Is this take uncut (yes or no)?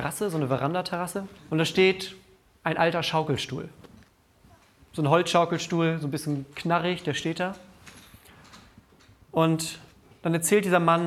no